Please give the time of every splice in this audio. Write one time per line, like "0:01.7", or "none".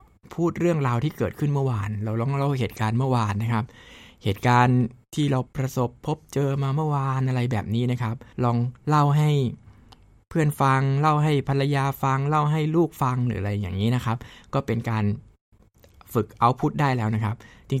0:05.5
0:08.3